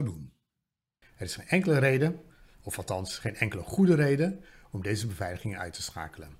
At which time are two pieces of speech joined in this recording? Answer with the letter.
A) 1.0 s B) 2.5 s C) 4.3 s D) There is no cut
A